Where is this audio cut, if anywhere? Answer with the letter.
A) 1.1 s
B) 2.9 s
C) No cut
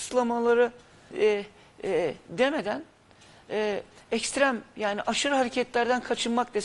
A